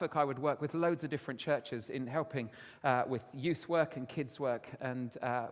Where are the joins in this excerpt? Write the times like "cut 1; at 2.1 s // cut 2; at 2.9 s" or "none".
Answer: none